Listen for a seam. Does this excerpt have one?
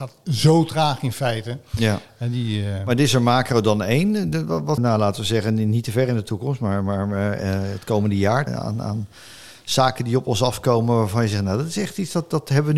yes; 2 cuts; at 4.8 s, 8.5 s

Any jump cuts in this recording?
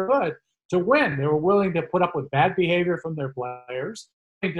no; 0 cuts

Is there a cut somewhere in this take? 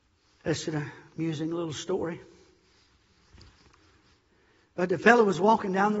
no; 0 cuts

